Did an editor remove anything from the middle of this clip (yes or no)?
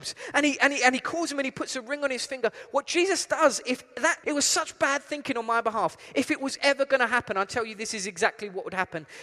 yes